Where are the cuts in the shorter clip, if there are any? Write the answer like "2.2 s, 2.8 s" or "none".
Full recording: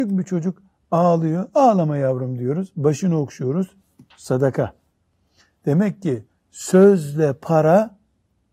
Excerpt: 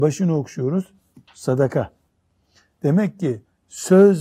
none